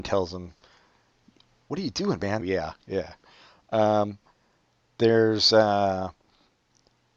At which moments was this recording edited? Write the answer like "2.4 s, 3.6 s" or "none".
2.4 s

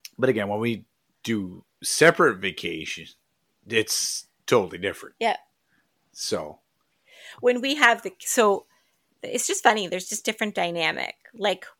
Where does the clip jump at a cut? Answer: none

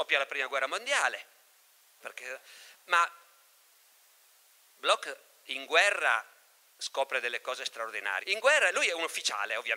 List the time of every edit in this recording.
2.0 s, 8.2 s

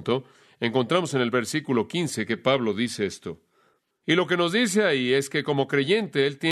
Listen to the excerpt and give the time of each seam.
3.9 s

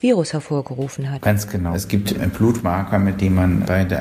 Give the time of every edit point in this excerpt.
none

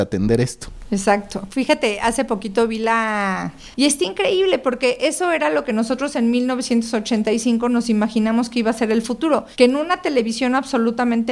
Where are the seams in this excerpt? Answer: 3.7 s

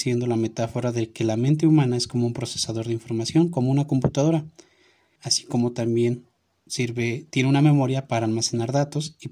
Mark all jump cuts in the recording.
5.2 s

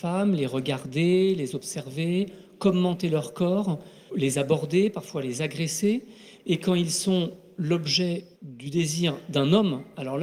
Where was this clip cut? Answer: 4.1 s, 6.4 s, 8.3 s

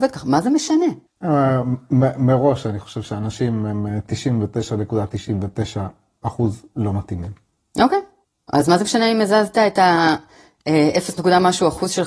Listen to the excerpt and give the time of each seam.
1.1 s

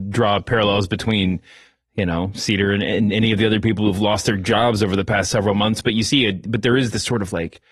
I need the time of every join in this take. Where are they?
1.8 s, 6.5 s

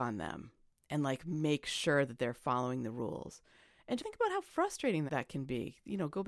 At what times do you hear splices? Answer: 4.0 s, 5.1 s

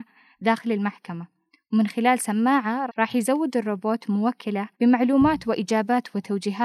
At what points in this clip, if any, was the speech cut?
2.9 s, 4.7 s

